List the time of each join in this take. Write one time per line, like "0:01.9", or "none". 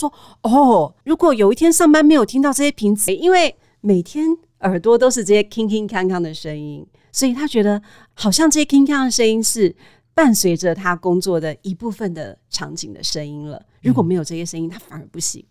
0:03.1